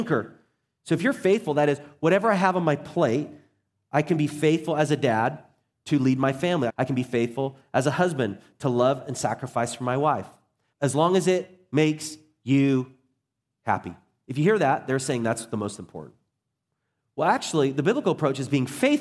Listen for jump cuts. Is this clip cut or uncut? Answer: cut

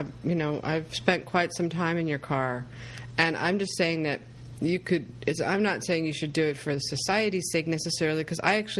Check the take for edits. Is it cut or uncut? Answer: uncut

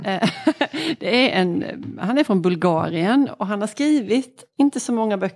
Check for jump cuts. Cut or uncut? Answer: uncut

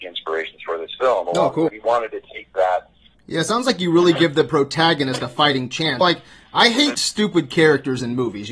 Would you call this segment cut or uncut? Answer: cut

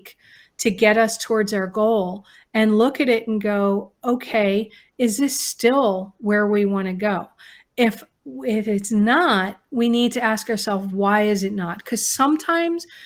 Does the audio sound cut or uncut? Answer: uncut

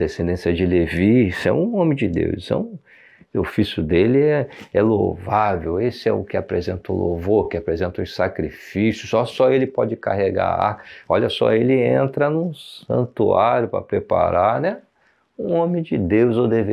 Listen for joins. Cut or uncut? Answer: uncut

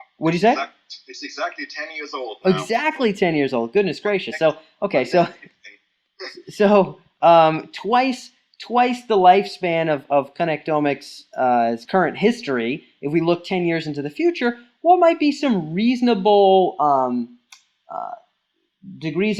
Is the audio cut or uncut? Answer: uncut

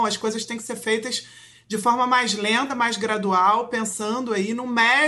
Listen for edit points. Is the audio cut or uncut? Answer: uncut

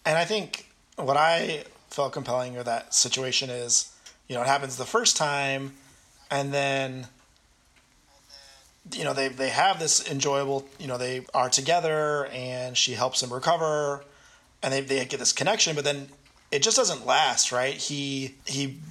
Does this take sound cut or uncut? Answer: uncut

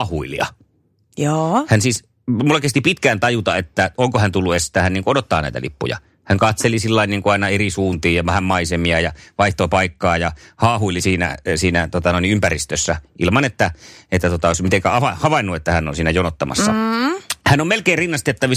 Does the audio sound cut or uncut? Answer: uncut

